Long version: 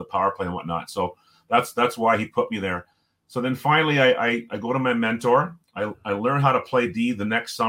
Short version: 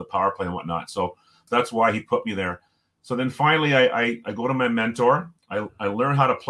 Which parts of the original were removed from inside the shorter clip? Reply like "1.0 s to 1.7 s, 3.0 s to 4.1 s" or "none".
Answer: 1.5 s to 1.7 s